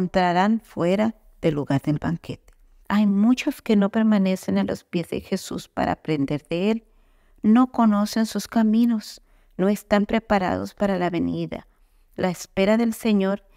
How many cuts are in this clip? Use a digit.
1